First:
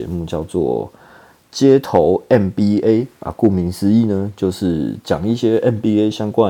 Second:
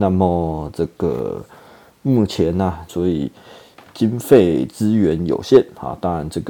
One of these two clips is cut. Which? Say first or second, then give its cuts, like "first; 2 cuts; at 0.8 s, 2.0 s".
second; 1 cut; at 2.9 s